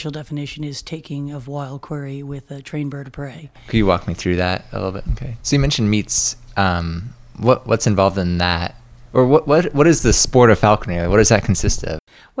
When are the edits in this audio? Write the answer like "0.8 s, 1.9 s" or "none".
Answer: 5.0 s

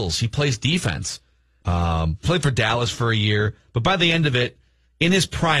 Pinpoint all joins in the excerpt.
1.6 s

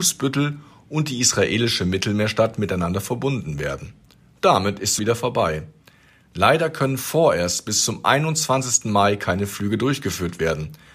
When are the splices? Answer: 5.0 s

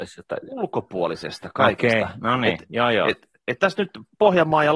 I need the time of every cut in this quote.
2.7 s

